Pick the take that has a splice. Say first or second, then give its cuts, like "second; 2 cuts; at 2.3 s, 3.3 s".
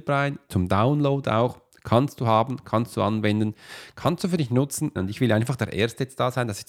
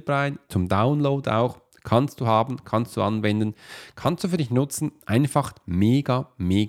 first; 1 cut; at 5.0 s